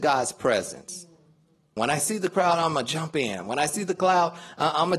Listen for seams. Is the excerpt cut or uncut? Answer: cut